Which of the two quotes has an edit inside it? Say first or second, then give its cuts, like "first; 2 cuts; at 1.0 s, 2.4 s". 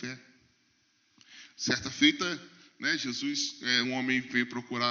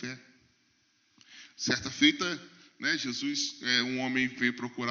first; 1 cut; at 3.8 s